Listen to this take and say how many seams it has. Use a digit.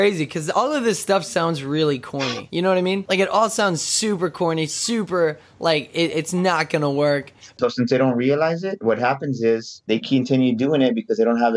1